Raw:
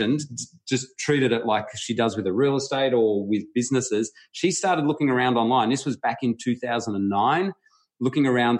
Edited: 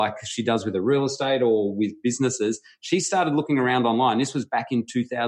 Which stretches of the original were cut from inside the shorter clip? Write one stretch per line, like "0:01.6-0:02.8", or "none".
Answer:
none